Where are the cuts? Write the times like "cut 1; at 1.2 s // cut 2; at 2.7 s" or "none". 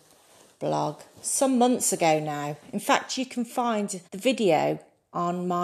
cut 1; at 4.0 s